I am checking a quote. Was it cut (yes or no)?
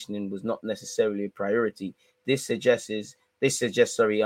no